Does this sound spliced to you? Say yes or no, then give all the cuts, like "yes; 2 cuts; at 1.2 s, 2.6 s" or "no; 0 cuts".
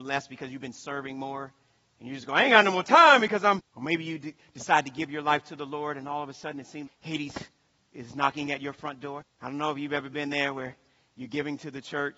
yes; 3 cuts; at 3.6 s, 6.9 s, 9.2 s